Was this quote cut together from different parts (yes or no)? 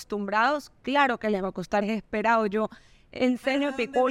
yes